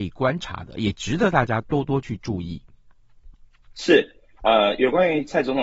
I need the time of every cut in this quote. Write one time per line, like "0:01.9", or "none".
none